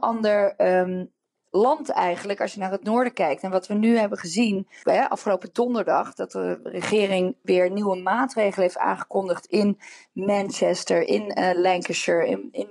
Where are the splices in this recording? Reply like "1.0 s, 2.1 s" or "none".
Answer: 4.8 s, 11.1 s